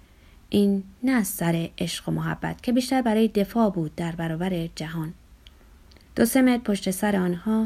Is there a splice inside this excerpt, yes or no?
yes